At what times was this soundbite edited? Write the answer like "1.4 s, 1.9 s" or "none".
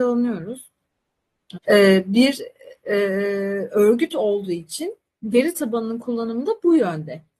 1.6 s